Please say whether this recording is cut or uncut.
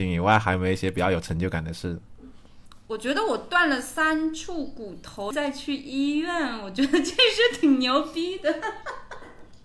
cut